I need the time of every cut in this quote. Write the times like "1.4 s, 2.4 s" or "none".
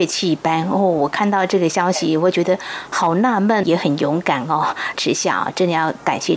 3.6 s, 4.9 s